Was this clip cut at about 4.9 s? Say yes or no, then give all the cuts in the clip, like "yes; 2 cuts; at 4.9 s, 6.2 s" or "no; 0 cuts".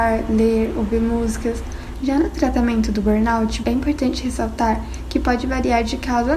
no; 2 cuts; at 1.9 s, 3.6 s